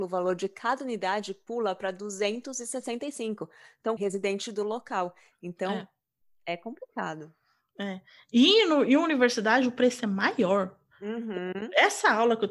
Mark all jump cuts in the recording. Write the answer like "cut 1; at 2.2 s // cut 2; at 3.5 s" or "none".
cut 1; at 4.0 s